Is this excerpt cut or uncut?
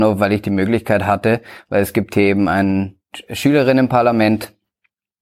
uncut